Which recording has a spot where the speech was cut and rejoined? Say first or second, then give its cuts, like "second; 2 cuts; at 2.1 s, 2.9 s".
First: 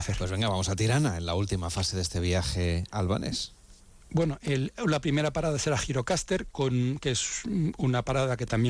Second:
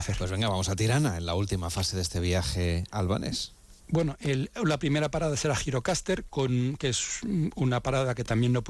second; 1 cut; at 3.8 s